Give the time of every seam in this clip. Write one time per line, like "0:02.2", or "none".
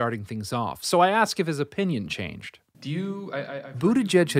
0:02.7